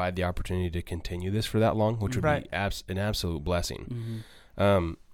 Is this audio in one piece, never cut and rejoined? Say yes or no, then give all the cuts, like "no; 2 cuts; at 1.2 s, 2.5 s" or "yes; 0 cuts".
yes; 0 cuts